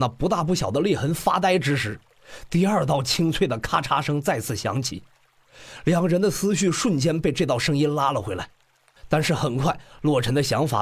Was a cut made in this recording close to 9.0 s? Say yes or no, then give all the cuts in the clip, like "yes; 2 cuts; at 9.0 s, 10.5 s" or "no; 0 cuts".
yes; 1 cut; at 9.0 s